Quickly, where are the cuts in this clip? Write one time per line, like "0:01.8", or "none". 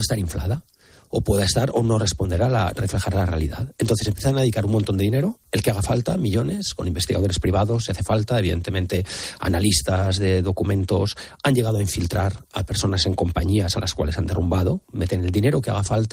none